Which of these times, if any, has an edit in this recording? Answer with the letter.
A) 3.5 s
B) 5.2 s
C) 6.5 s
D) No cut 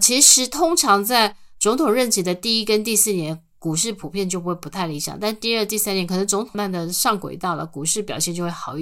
C